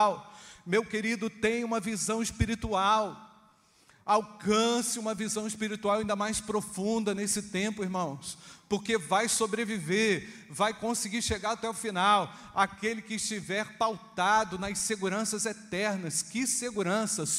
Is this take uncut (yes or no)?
yes